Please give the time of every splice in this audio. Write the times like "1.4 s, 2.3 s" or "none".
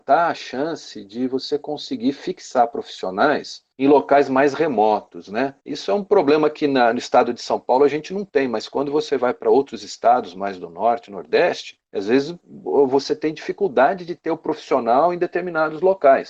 5.6 s